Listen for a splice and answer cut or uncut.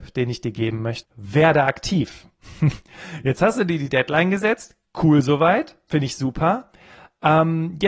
cut